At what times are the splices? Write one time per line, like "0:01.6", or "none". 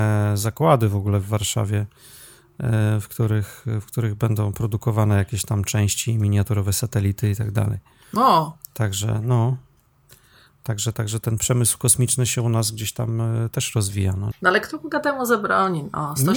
0:10.9
0:14.3